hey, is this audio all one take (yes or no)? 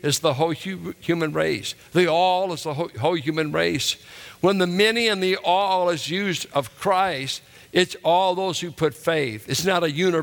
yes